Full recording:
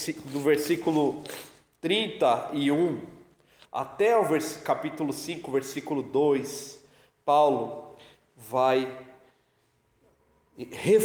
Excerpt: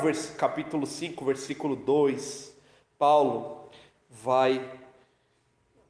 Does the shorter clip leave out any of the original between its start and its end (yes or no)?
no